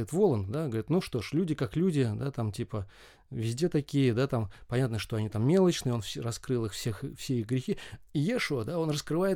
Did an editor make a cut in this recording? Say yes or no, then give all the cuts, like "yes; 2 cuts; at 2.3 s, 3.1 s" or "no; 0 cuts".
no; 0 cuts